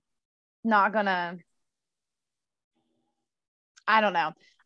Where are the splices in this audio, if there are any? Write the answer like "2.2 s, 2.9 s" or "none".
none